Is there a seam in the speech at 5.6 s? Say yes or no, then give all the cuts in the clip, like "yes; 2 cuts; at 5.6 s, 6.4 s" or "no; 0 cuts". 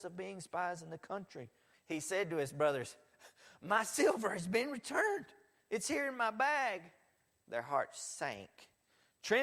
no; 1 cut; at 1.7 s